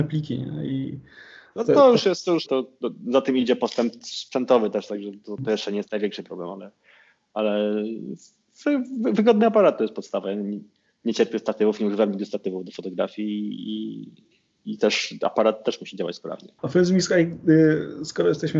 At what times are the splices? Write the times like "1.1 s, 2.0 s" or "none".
2.5 s, 16.6 s